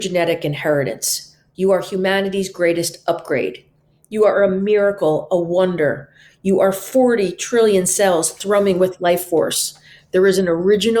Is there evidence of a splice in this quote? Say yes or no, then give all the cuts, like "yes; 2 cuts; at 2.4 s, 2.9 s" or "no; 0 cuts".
no; 0 cuts